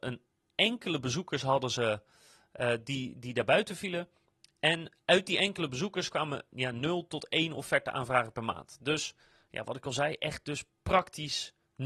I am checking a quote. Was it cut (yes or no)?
no